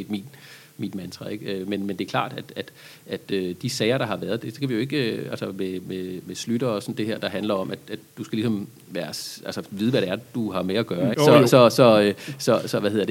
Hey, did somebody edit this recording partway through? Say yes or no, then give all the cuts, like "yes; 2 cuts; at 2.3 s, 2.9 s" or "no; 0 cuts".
yes; 1 cut; at 11.1 s